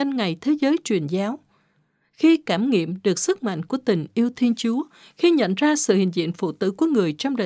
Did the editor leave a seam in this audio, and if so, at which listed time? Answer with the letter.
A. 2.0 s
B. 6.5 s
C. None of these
C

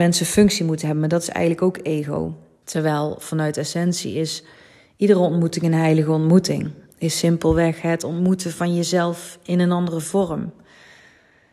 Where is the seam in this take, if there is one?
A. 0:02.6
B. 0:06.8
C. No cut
A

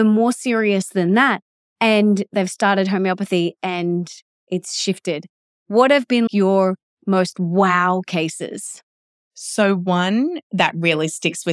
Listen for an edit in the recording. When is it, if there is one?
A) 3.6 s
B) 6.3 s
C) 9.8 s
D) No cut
B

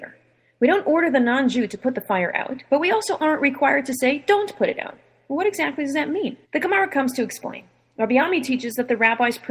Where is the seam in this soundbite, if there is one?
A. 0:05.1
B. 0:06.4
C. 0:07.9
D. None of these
B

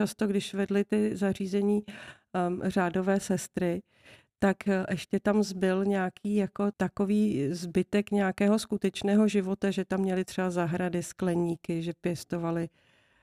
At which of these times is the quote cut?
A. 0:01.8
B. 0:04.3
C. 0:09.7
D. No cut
D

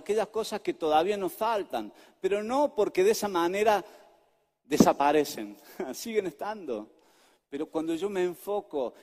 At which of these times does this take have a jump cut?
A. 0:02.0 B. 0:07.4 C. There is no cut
C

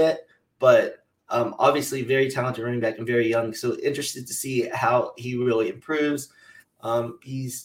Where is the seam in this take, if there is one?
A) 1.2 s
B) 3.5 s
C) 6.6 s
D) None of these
C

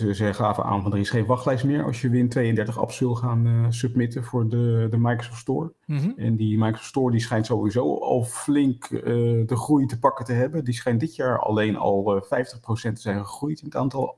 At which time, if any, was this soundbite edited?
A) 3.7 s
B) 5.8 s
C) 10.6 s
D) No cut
B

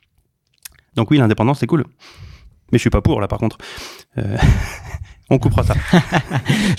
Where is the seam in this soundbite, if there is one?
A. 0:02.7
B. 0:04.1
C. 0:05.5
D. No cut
A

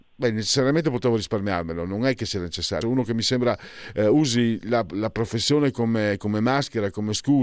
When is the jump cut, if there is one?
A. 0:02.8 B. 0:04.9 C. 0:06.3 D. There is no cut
A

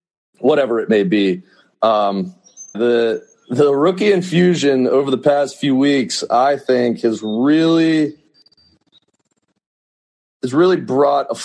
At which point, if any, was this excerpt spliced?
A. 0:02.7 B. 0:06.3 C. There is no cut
A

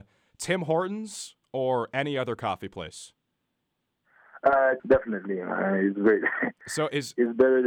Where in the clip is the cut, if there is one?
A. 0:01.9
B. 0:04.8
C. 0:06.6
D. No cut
B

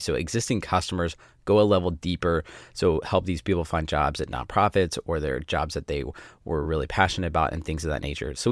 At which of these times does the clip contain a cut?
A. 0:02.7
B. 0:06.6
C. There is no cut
C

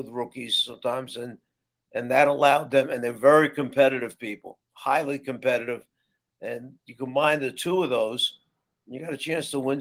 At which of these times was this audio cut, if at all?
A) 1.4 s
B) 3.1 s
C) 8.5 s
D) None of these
D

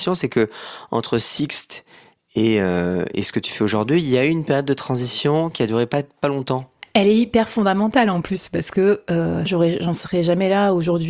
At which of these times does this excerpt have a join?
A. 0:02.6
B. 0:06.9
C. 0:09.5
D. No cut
C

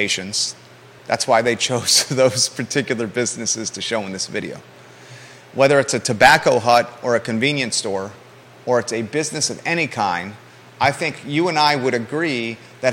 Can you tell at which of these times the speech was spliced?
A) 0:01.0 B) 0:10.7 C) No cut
A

